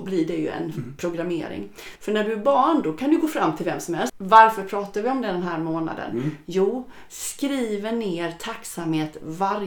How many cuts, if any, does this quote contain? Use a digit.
3